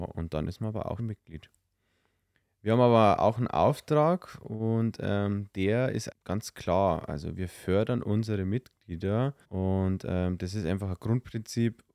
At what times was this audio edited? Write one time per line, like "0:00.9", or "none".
0:01.0
0:06.1
0:09.4